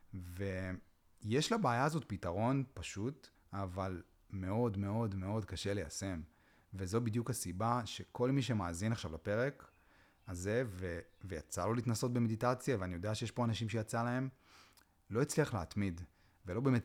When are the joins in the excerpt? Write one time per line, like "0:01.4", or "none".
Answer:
0:03.3

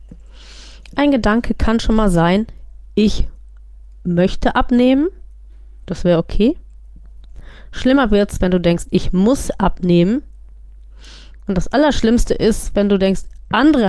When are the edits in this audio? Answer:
none

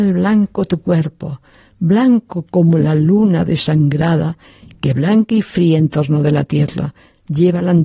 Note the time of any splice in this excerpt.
none

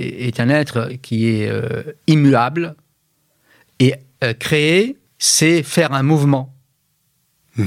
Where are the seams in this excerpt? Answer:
0:05.1

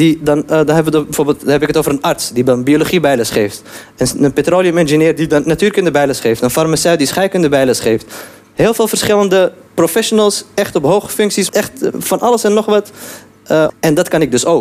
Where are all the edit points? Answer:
0:11.5
0:13.7

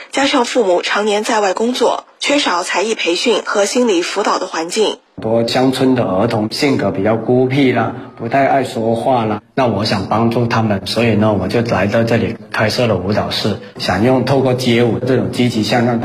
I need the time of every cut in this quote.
0:05.1
0:06.5

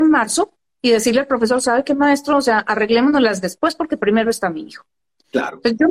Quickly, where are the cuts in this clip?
none

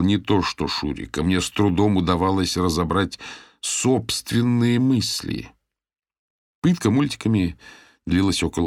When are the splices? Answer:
none

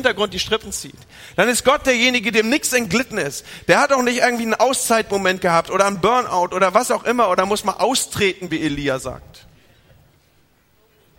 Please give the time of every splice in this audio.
none

